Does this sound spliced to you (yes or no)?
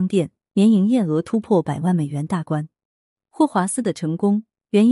no